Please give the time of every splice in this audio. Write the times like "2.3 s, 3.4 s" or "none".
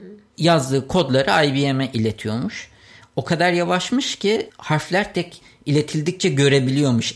5.1 s